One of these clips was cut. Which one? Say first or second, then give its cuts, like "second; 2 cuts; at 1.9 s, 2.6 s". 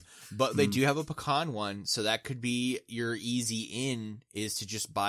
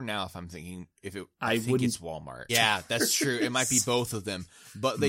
second; 2 cuts; at 1.0 s, 2.5 s